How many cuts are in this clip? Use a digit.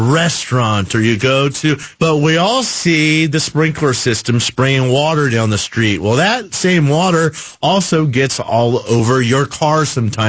1